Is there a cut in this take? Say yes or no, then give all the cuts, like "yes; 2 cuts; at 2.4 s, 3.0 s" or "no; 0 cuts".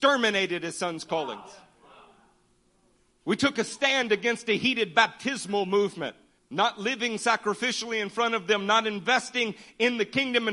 yes; 2 cuts; at 3.1 s, 6.4 s